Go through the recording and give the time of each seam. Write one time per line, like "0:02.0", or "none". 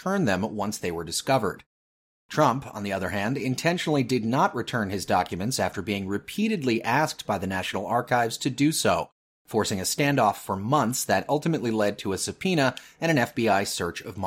none